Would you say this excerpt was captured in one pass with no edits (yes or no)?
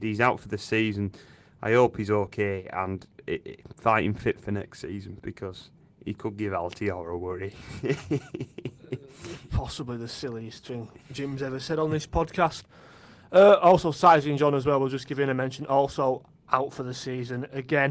yes